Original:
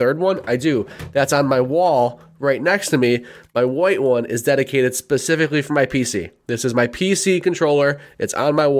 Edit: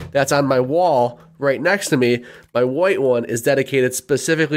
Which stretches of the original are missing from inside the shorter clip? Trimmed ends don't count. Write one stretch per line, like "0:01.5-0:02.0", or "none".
none